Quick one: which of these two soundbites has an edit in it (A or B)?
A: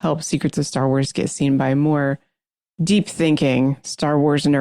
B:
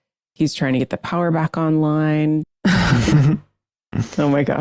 B